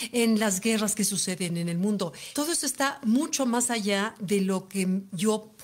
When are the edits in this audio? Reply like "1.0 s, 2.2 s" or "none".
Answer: none